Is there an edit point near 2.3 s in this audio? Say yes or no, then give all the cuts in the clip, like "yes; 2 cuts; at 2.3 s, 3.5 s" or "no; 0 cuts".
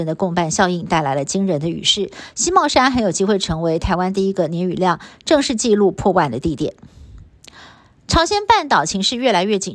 no; 0 cuts